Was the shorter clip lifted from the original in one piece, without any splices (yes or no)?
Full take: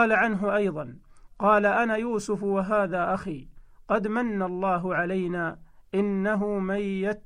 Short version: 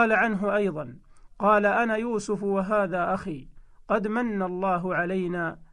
yes